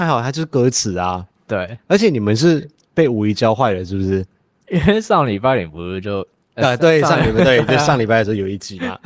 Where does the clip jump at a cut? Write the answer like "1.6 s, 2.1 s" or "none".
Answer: 4.5 s